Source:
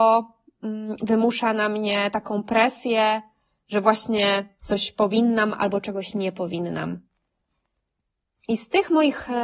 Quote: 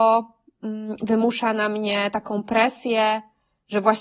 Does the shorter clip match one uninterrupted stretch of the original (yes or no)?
yes